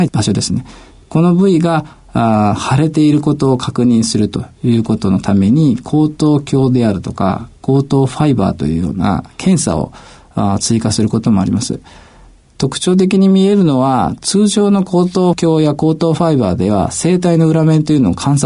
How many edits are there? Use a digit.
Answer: 0